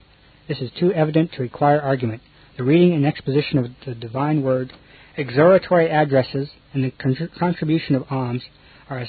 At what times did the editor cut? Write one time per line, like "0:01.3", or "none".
0:06.6